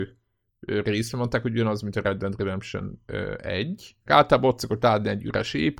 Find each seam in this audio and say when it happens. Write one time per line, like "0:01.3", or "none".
0:04.1

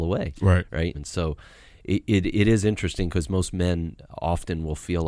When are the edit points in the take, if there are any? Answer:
0:00.9

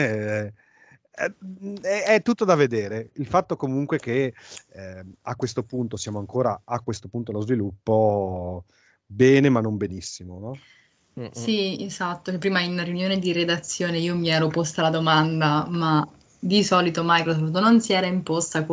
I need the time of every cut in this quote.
none

